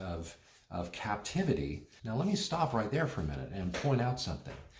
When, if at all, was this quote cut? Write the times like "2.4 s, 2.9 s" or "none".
2.0 s